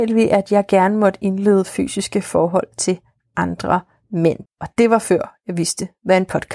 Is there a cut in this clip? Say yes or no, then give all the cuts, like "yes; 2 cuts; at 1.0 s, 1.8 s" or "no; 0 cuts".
yes; 1 cut; at 4.5 s